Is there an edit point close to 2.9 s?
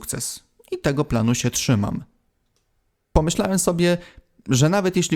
yes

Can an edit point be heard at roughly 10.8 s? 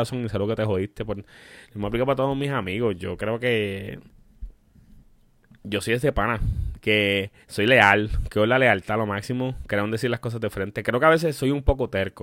no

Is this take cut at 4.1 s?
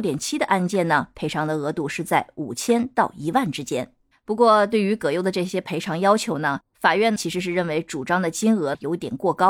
yes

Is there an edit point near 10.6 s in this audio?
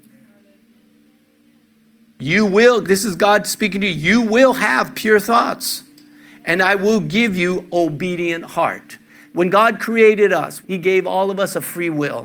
yes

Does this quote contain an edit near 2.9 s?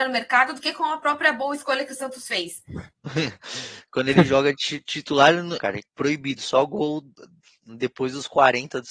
yes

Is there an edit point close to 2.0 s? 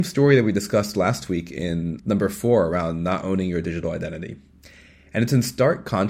yes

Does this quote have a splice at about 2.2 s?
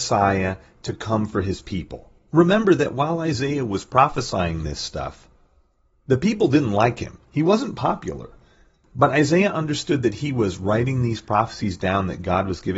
no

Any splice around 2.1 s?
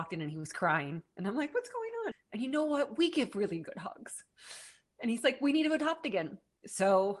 yes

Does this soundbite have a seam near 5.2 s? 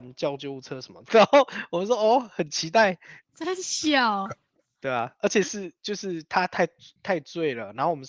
no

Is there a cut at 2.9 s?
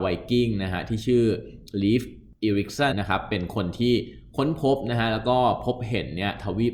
yes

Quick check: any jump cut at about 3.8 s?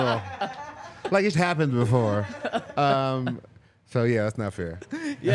no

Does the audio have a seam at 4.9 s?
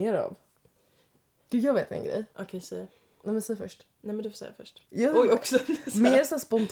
yes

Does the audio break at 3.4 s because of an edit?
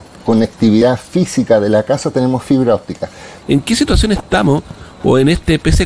yes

